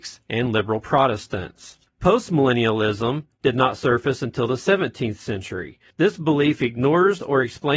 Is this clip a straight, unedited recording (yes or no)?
no